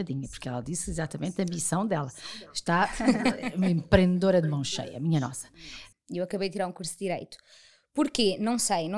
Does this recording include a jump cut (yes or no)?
yes